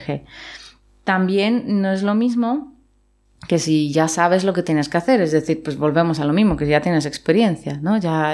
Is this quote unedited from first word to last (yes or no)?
yes